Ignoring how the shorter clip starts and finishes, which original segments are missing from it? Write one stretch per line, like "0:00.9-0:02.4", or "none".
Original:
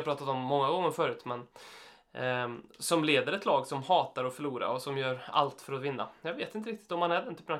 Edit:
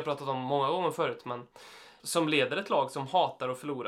0:02.0-0:02.8